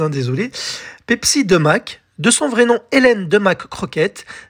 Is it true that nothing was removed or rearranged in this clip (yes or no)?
yes